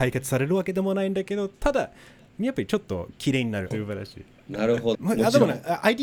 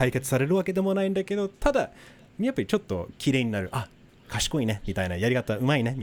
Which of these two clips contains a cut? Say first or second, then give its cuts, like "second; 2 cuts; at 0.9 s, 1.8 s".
first; 2 cuts; at 3.7 s, 4.9 s